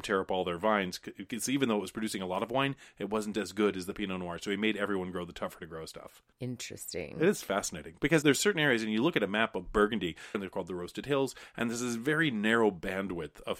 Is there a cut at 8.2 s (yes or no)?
yes